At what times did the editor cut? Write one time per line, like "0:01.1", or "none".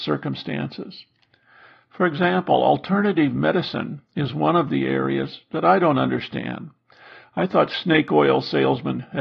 none